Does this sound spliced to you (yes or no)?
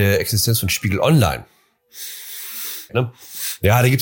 yes